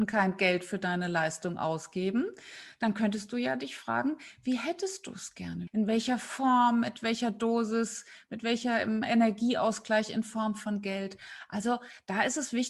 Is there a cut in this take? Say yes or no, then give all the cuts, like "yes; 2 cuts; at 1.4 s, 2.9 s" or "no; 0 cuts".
yes; 1 cut; at 5.7 s